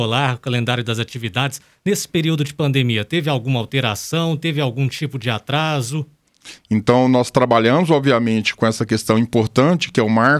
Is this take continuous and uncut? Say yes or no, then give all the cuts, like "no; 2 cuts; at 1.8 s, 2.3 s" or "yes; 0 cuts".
no; 1 cut; at 6.6 s